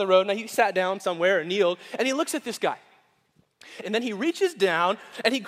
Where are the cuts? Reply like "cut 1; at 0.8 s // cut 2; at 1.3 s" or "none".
cut 1; at 1.0 s // cut 2; at 3.8 s